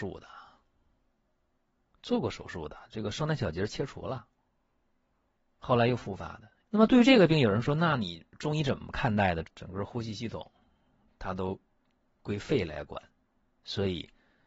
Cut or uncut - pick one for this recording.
cut